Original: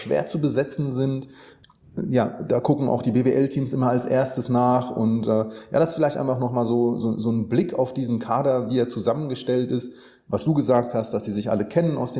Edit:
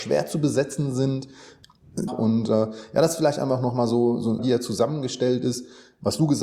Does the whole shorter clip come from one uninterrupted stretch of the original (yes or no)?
no